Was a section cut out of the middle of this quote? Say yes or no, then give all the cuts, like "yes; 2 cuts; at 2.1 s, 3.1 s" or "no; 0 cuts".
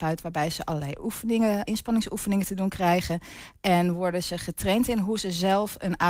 yes; 1 cut; at 1.7 s